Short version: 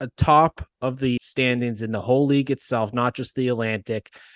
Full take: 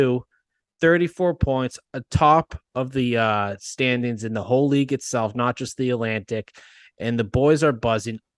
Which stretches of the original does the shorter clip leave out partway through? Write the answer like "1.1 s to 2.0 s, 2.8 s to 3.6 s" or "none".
3.1 s to 3.6 s